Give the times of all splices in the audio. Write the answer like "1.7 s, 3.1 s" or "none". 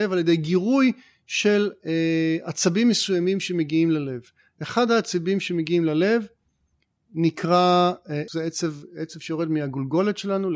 8.3 s